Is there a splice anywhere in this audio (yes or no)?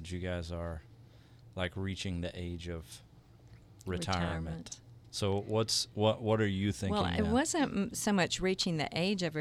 no